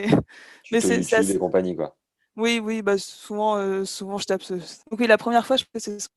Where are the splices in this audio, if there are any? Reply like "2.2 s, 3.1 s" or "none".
4.8 s